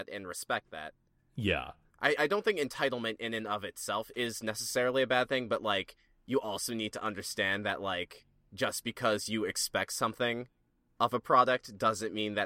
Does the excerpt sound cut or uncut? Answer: uncut